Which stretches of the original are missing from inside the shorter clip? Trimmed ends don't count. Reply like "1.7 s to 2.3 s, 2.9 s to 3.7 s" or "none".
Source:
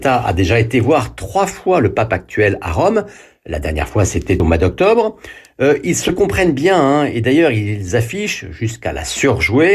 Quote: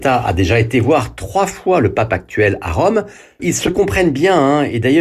3.4 s to 5.8 s